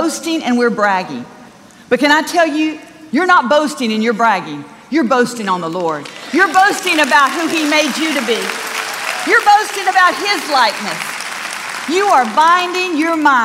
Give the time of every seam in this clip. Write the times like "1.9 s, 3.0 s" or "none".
none